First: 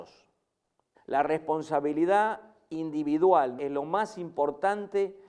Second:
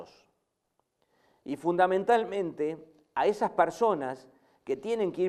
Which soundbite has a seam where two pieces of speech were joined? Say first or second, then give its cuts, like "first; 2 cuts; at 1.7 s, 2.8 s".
first; 2 cuts; at 0.9 s, 3.6 s